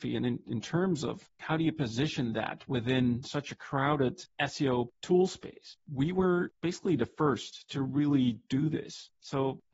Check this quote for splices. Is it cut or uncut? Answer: uncut